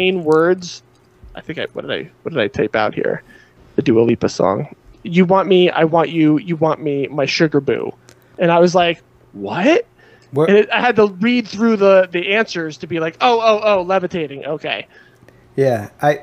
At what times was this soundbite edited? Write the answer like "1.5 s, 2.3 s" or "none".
none